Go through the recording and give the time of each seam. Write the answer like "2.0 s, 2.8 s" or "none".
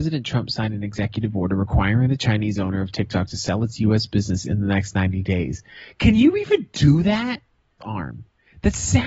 7.8 s